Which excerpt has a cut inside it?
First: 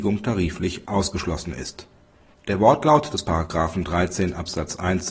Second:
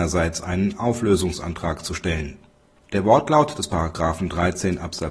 second; 1 cut; at 2.8 s

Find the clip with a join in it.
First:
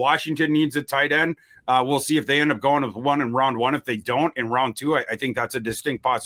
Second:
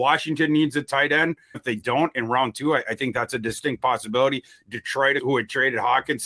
second; 2 cuts; at 1.5 s, 5.2 s

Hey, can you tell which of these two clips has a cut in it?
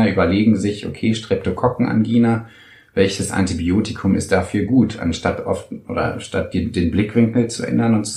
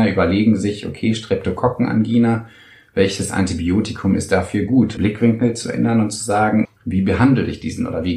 second; 2 cuts; at 5.0 s, 6.6 s

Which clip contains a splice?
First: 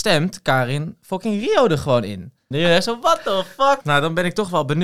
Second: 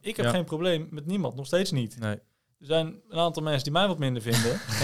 first; 2 cuts; at 2.5 s, 3.8 s

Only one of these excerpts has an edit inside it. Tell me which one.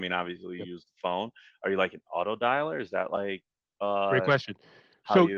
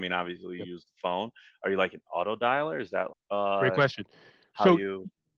second; 1 cut; at 3.1 s

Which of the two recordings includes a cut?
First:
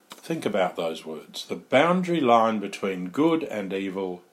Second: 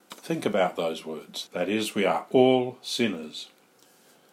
second; 1 cut; at 1.5 s

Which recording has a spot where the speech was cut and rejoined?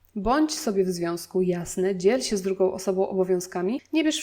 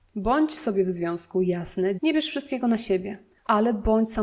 second; 1 cut; at 2.0 s

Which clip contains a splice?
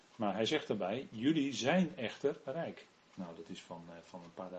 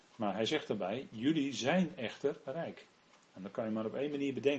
first; 1 cut; at 3.2 s

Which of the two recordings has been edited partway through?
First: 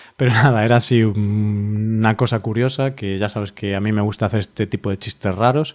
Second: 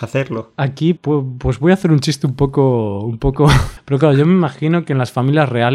second; 2 cuts; at 1.0 s, 3.8 s

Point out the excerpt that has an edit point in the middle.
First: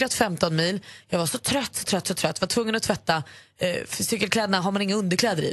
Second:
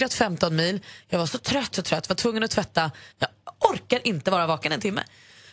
second; 2 cuts; at 1.7 s, 3.1 s

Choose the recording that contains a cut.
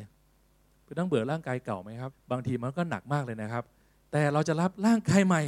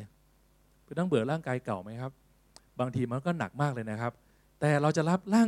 first; 1 cut; at 2.1 s

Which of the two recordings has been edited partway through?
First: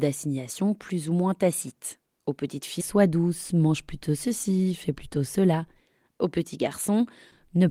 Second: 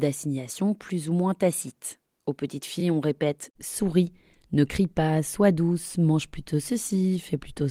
first; 1 cut; at 2.8 s

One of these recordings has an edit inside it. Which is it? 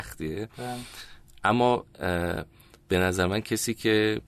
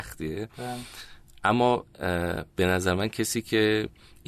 second; 1 cut; at 2.5 s

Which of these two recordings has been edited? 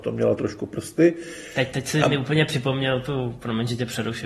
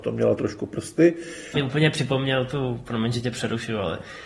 second; 1 cut; at 1.5 s

